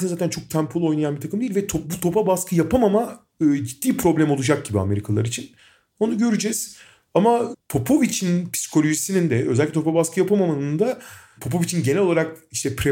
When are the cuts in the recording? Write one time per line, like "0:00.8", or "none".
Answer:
none